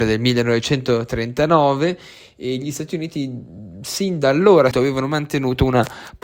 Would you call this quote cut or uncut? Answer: cut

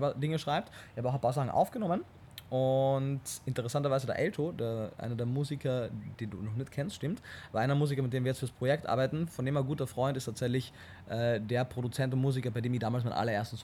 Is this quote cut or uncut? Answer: uncut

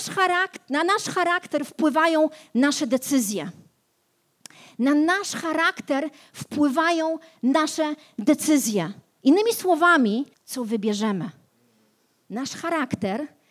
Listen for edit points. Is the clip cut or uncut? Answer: cut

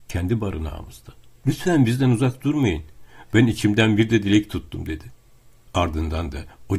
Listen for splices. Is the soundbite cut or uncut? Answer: cut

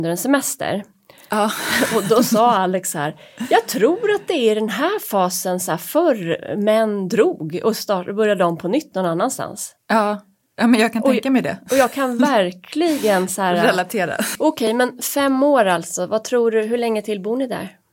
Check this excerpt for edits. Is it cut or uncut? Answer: cut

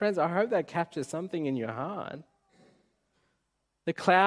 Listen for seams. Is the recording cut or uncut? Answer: uncut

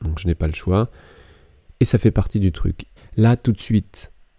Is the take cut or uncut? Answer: cut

